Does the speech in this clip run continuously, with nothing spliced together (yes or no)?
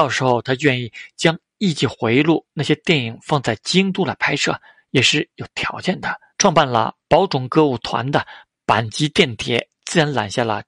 no